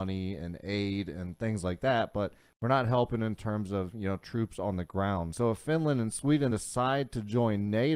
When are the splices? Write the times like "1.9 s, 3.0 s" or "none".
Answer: 5.3 s, 6.5 s